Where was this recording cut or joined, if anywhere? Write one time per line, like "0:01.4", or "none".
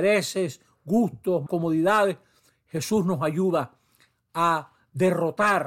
0:01.5